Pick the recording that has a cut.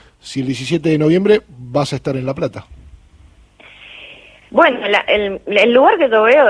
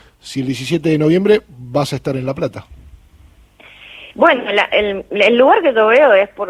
second; 1 cut; at 4.1 s

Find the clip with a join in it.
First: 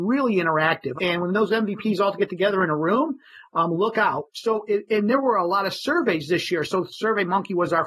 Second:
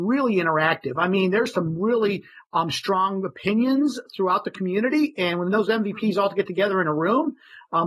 first; 2 cuts; at 1.0 s, 4.3 s

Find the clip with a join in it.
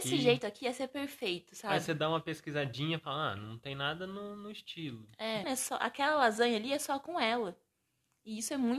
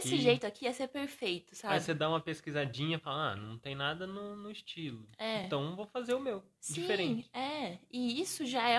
first; 1 cut; at 5.4 s

